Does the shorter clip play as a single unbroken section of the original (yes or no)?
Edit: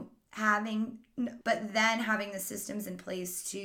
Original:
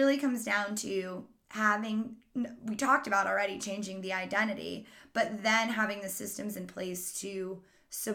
no